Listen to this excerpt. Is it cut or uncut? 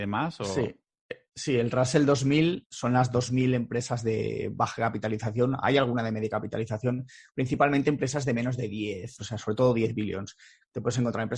cut